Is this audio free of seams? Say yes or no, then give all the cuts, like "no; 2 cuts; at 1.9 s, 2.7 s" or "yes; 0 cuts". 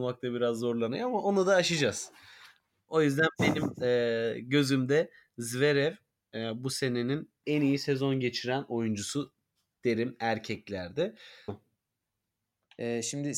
no; 1 cut; at 11.5 s